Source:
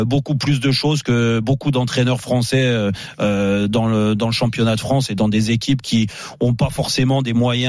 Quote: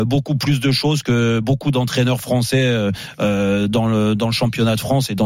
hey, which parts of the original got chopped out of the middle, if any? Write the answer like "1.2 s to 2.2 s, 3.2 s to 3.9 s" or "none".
none